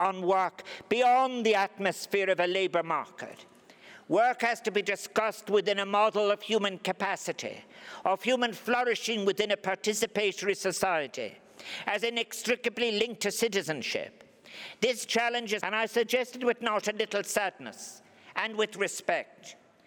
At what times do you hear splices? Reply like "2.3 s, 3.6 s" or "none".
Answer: 15.6 s